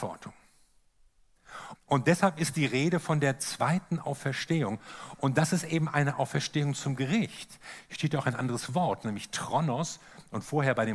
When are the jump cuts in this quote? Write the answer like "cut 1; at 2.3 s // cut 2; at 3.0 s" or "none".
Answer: cut 1; at 1.8 s